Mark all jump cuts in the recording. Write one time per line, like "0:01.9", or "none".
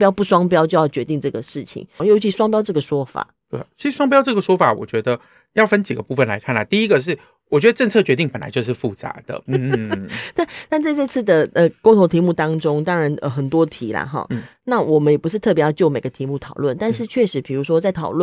0:02.0
0:09.5